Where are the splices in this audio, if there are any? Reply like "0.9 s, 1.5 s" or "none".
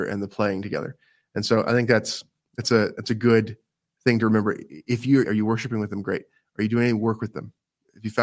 5.2 s